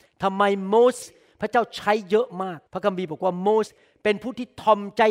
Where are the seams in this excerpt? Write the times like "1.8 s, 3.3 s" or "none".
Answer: 1.0 s, 2.7 s, 3.7 s